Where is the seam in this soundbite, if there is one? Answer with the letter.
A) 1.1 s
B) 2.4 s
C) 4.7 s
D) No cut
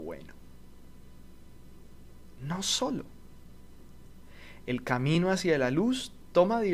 D